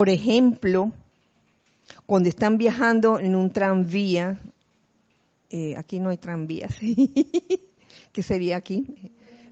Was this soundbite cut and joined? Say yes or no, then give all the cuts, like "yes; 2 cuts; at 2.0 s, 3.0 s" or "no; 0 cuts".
no; 0 cuts